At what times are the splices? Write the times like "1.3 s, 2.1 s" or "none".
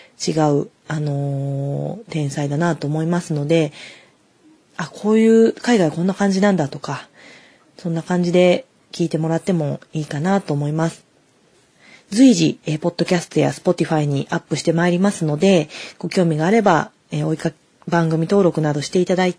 none